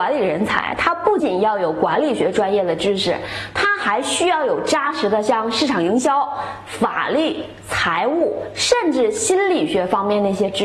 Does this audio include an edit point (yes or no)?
yes